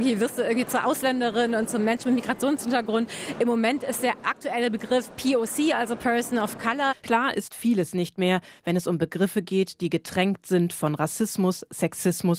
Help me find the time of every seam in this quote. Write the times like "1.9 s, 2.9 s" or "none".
none